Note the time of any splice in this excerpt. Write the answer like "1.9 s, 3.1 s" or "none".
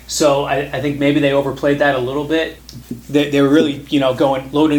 2.8 s